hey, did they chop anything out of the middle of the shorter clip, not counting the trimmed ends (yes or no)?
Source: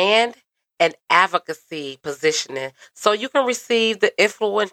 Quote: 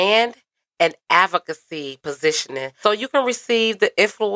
yes